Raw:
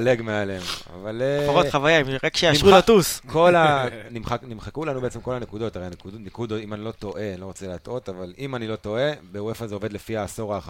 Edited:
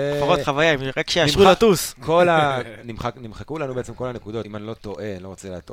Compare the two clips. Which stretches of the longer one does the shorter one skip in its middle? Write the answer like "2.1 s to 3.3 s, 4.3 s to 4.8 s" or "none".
5.7 s to 6.6 s